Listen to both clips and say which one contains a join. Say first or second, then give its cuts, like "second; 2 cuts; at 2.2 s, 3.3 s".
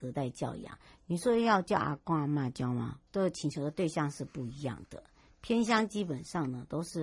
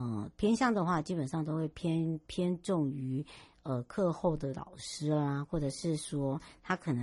first; 1 cut; at 3.1 s